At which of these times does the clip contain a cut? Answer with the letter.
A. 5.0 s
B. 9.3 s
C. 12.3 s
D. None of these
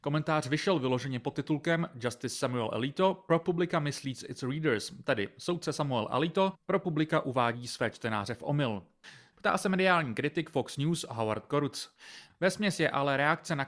B